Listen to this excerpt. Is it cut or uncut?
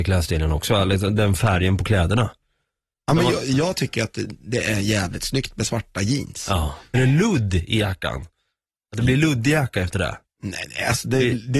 cut